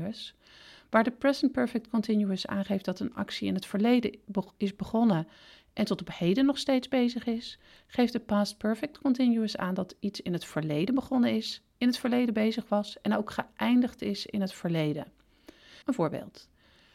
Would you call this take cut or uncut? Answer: cut